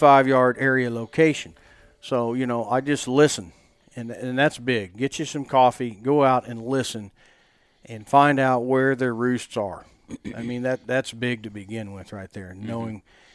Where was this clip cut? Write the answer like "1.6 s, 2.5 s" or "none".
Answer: none